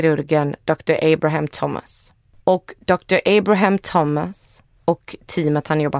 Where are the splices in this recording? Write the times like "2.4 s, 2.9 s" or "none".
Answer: 2.4 s

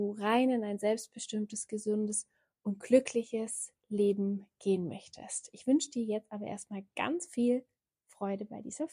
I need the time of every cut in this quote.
none

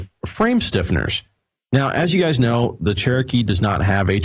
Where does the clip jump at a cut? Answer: none

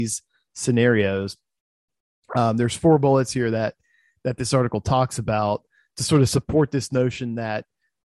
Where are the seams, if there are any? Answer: none

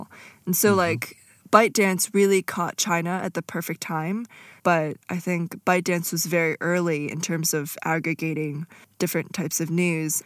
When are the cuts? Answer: 4.6 s

